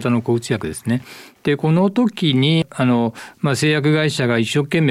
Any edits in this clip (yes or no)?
no